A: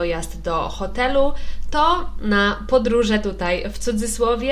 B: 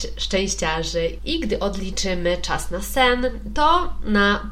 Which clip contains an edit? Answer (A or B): B